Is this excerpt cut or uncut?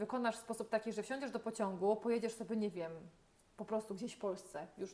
uncut